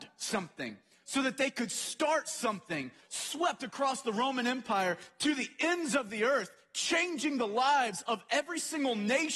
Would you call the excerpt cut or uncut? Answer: cut